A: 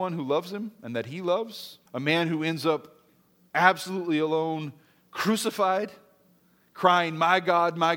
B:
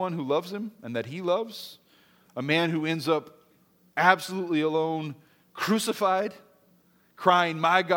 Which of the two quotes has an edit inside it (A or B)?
A